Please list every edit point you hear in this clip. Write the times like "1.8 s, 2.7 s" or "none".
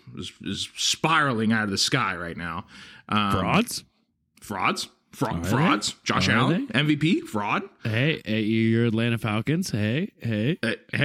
none